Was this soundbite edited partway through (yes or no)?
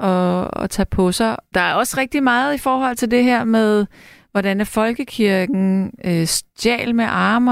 yes